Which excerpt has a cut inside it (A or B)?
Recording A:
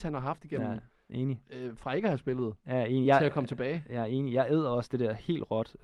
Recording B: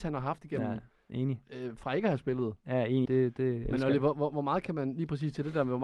B